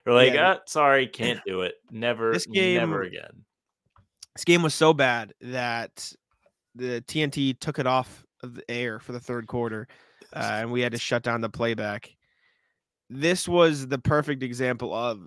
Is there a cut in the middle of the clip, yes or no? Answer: no